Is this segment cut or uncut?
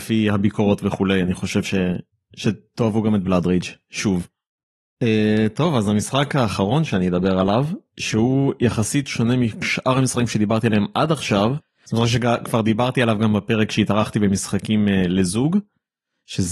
uncut